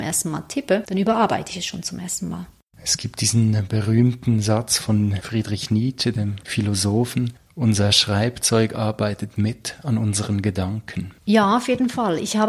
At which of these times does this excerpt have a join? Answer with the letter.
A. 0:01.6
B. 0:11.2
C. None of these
B